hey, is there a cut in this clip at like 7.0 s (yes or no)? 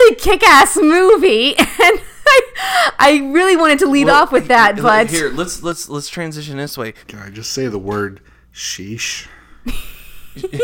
yes